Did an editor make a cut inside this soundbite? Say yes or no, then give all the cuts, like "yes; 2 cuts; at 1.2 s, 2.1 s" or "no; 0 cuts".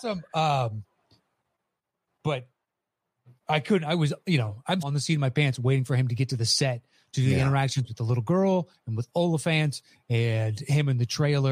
yes; 1 cut; at 4.8 s